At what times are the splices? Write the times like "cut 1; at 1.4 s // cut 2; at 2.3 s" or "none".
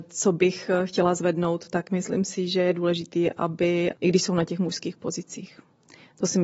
cut 1; at 3.9 s